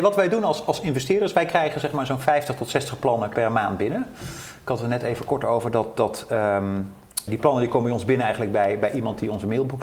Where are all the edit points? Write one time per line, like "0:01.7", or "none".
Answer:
0:07.3